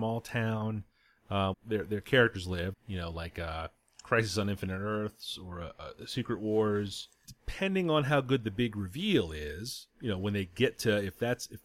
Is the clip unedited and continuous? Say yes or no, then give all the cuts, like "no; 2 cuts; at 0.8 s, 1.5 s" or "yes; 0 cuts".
no; 3 cuts; at 1.5 s, 2.7 s, 7.2 s